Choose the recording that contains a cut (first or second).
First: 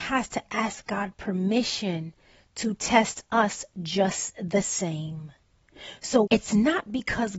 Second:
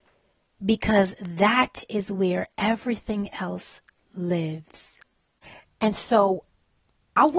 first